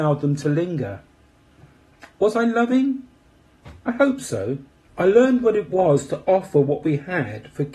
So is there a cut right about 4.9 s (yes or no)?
yes